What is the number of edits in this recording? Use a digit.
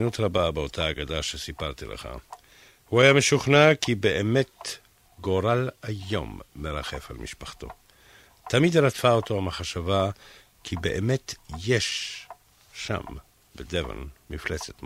0